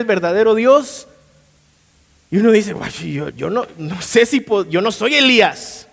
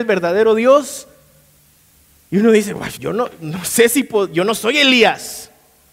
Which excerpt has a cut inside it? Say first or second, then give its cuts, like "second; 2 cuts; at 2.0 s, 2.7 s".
second; 1 cut; at 2.9 s